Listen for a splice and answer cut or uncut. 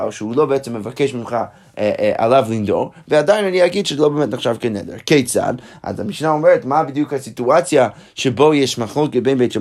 uncut